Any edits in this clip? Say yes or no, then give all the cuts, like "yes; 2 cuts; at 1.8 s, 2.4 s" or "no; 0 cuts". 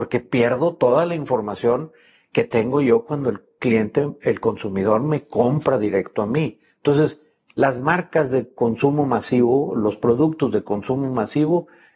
no; 0 cuts